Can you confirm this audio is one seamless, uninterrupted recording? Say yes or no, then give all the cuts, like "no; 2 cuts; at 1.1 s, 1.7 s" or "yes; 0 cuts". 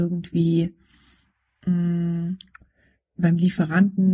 yes; 0 cuts